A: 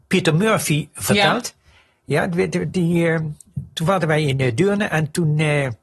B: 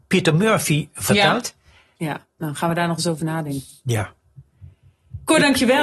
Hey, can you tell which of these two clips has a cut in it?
B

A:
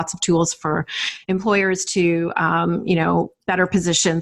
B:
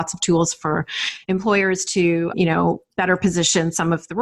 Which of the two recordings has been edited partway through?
B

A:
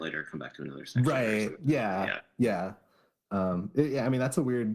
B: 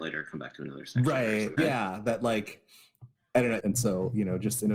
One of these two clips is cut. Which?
B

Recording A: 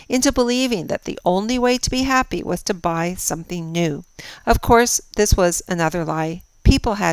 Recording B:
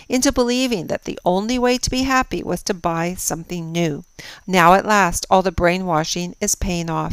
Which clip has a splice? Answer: B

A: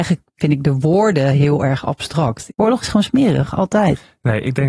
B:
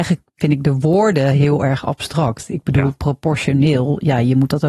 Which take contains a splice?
A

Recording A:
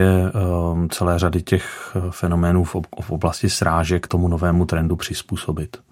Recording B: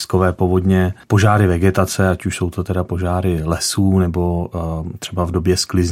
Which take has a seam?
A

